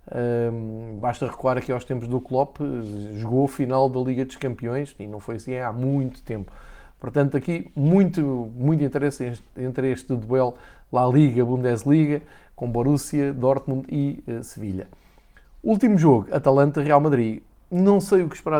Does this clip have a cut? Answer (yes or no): no